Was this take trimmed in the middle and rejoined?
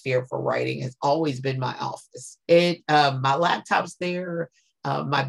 yes; 1 cut; at 2.4 s

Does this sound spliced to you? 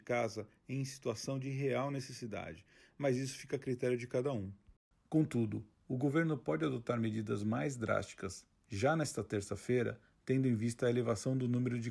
no; 0 cuts

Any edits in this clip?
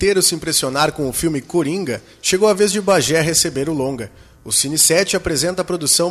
no; 0 cuts

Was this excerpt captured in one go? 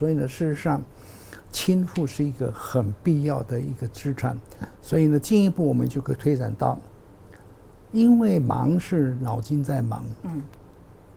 yes; 0 cuts

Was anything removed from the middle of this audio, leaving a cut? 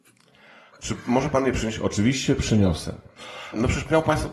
no; 0 cuts

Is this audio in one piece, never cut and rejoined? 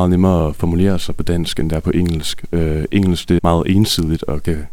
no; 1 cut; at 3.4 s

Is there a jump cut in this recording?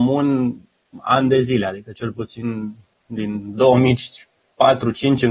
no; 0 cuts

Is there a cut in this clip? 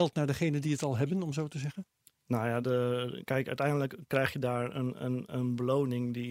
no; 0 cuts

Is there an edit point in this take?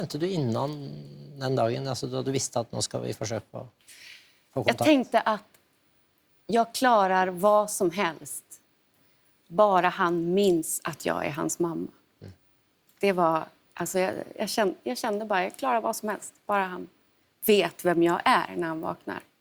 no; 0 cuts

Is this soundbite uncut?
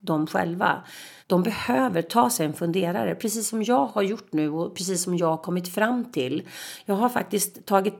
no; 1 cut; at 1.2 s

